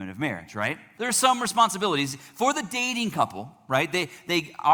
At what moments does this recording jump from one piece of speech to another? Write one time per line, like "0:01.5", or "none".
0:01.0